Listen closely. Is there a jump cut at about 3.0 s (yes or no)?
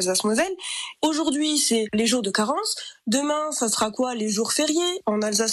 no